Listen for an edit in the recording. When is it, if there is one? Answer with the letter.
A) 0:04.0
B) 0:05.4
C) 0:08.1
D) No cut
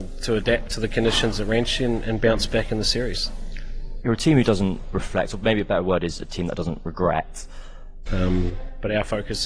C